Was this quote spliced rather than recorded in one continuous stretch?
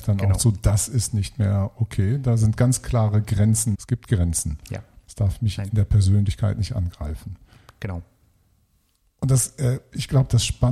yes; 2 cuts; at 3.7 s, 5.0 s

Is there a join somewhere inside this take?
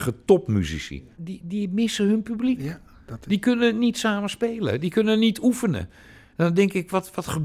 no; 0 cuts

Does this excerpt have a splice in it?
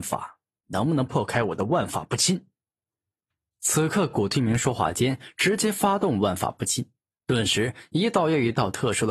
no; 0 cuts

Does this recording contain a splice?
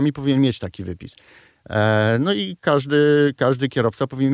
no; 0 cuts

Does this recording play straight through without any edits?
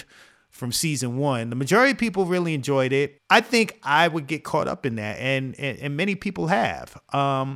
no; 1 cut; at 3.2 s

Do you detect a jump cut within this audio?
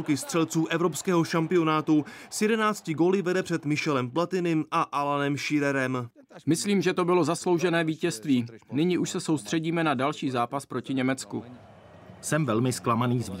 no; 0 cuts

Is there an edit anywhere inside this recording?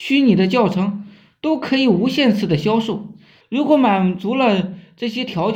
yes; 1 cut; at 3.4 s

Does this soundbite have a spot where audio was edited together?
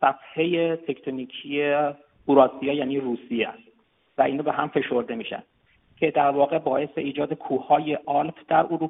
no; 0 cuts

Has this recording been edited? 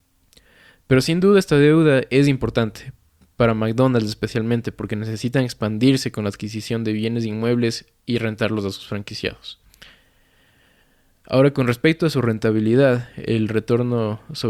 no; 0 cuts

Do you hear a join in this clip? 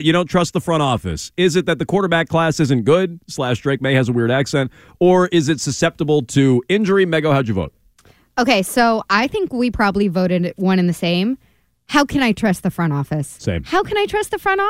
no; 0 cuts

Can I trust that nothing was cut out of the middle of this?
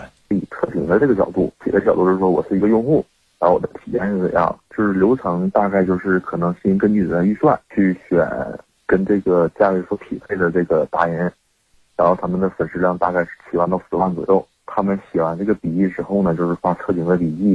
yes; 0 cuts

